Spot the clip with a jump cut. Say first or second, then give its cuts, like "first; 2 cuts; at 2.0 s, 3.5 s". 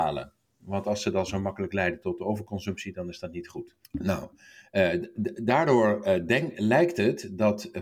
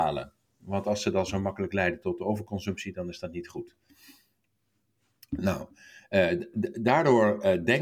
first; 1 cut; at 3.8 s